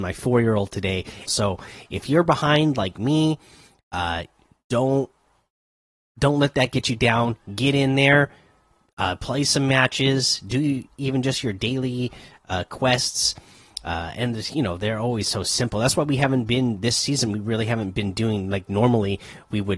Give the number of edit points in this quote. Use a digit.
1